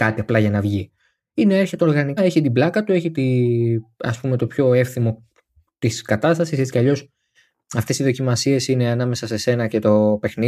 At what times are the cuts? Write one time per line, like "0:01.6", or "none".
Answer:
0:02.2